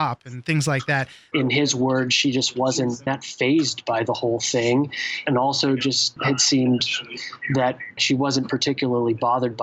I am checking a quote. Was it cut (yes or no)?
yes